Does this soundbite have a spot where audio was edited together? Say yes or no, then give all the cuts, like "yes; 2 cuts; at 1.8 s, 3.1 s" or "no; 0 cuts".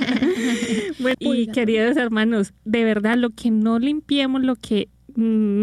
yes; 2 cuts; at 1.1 s, 2.6 s